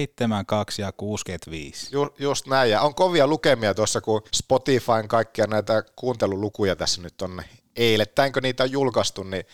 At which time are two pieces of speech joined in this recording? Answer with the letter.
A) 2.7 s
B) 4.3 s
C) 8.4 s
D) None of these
B